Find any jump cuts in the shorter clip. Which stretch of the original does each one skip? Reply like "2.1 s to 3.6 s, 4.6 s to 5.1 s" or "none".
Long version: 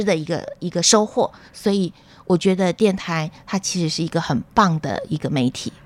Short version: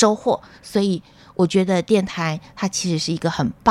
none